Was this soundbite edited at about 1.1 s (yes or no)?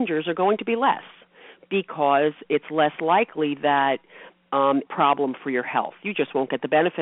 no